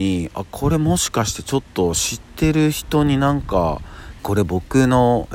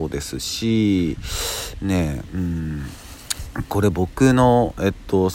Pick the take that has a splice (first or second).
first